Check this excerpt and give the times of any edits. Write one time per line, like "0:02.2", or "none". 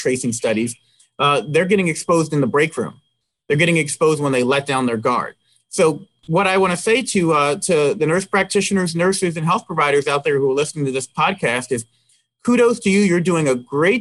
none